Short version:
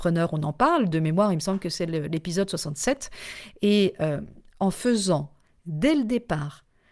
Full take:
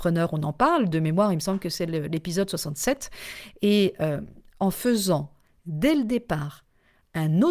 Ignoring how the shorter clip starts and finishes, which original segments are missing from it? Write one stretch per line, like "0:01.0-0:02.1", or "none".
none